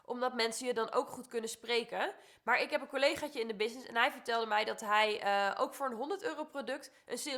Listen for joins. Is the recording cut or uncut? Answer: uncut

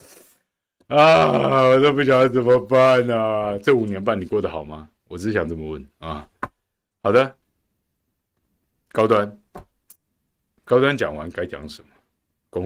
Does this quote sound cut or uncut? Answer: uncut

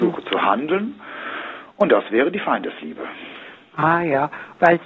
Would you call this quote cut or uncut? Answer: uncut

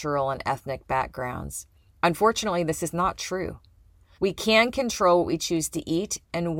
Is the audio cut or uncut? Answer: cut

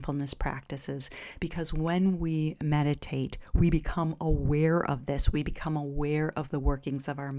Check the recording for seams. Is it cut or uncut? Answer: uncut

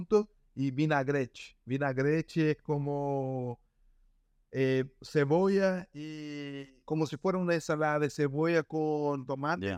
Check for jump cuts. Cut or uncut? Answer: uncut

